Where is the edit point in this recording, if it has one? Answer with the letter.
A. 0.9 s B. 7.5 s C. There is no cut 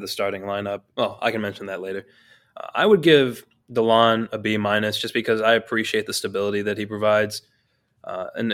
A